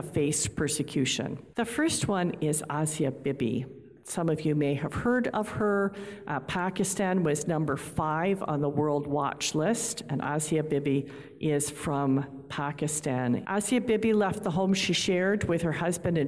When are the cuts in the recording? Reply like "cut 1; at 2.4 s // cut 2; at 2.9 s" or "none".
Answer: cut 1; at 1.5 s // cut 2; at 13.4 s